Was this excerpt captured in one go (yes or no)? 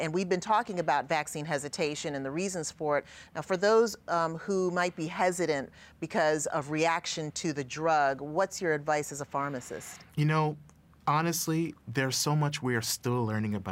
no